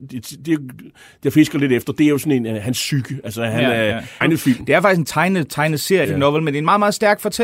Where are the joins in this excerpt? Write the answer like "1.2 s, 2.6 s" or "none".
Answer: 4.2 s, 6.0 s

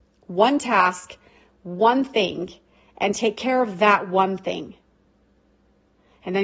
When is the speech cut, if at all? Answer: none

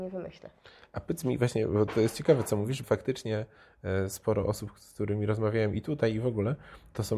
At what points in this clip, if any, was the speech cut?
2.8 s

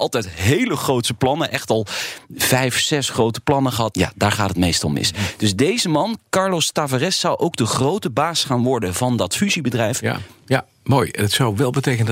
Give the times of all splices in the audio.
3.9 s, 10.4 s

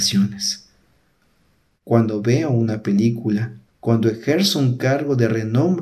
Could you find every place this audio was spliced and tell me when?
3.7 s

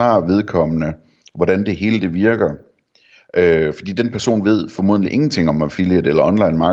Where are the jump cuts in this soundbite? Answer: none

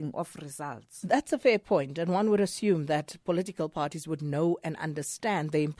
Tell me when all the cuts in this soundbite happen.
none

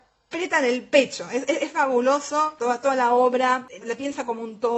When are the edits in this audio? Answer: 2.6 s, 3.8 s

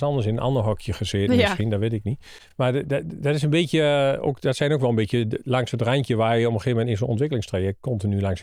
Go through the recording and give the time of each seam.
none

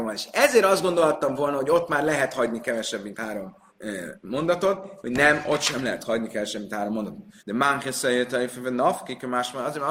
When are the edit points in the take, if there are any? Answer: 3.7 s, 5.0 s, 7.4 s

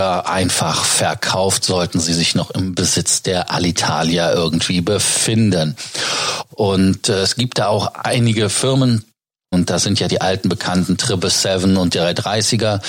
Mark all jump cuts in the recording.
6.5 s, 9.5 s

